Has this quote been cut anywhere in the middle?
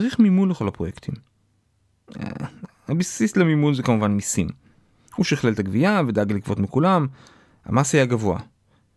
no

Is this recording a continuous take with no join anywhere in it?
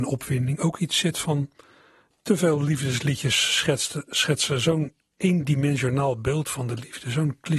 no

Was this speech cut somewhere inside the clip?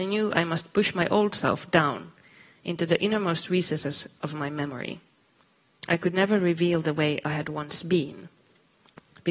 no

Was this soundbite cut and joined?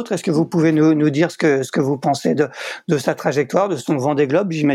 no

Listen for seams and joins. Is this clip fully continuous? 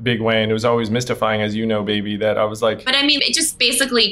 no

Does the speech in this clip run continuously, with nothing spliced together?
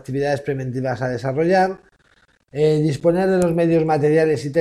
yes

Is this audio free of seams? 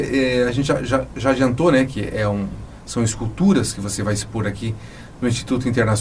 yes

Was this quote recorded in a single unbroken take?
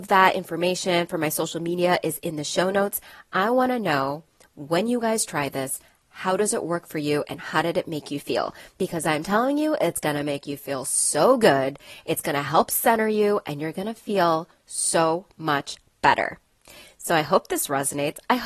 yes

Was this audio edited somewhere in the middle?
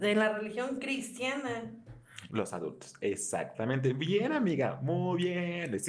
yes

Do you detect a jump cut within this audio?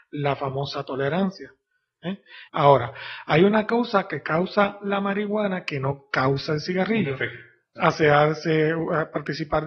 yes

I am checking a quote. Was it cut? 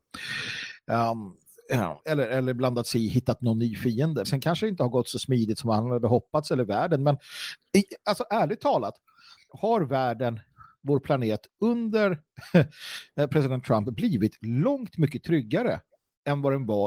yes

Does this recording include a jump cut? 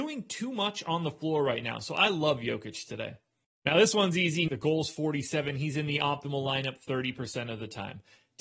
yes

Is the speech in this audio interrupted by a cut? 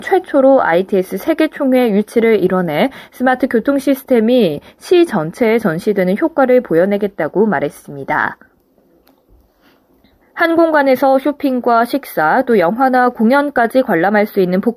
no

